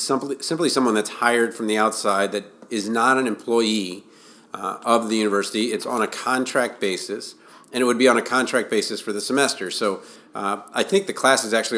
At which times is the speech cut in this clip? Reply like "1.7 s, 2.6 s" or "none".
none